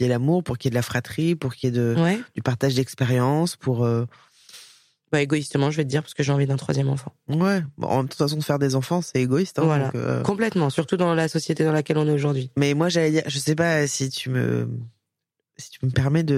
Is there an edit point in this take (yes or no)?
no